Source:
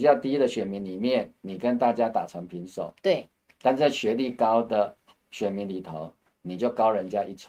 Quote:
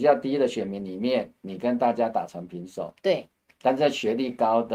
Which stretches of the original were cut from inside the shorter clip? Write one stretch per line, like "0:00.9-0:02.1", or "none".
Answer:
none